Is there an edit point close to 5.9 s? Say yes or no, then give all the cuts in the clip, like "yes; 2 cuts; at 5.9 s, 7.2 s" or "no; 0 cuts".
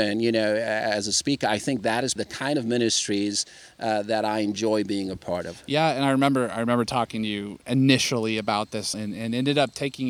no; 2 cuts; at 2.2 s, 8.9 s